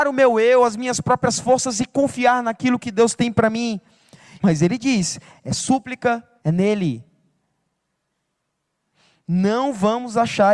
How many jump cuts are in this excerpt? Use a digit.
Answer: 2